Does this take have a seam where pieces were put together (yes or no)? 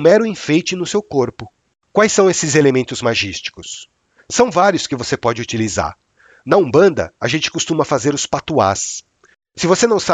no